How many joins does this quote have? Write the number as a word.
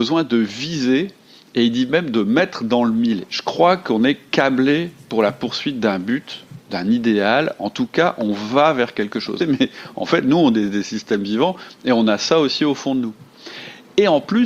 two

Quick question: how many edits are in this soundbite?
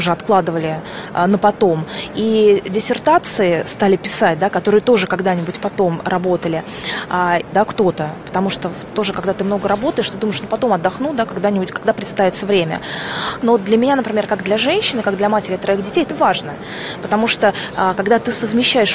three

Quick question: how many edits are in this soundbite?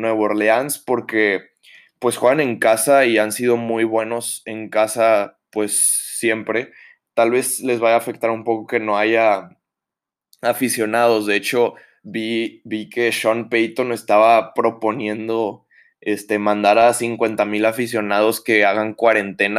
zero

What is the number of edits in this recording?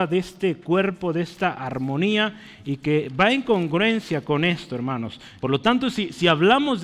one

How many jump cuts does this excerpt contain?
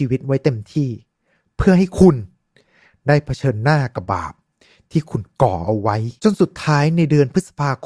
two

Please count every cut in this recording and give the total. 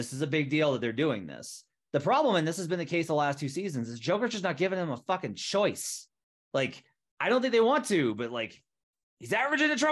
zero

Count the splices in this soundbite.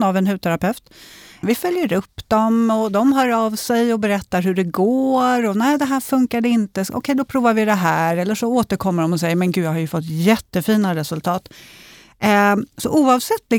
one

